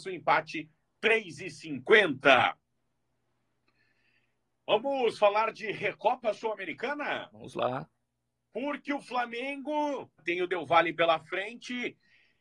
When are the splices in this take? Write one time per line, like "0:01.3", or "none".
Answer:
0:10.2